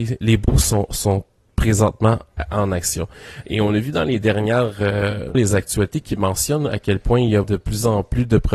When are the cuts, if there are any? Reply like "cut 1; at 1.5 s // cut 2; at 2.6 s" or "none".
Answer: cut 1; at 3.4 s // cut 2; at 5.3 s // cut 3; at 7.4 s